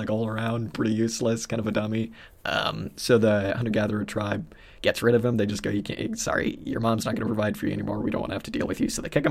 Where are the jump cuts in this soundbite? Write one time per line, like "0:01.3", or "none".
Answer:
none